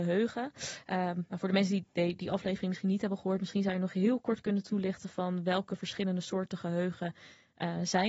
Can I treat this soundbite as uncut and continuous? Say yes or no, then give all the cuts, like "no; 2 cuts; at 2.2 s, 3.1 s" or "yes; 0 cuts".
yes; 0 cuts